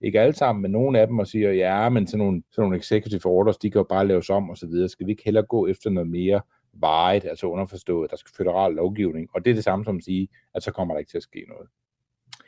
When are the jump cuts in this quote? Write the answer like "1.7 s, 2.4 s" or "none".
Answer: 2.5 s